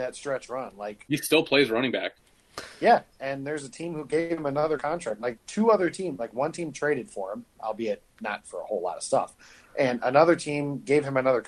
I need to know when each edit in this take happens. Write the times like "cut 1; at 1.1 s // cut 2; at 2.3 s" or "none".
none